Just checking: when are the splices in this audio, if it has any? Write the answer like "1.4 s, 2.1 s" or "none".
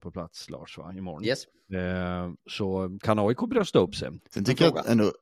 2.4 s, 4.2 s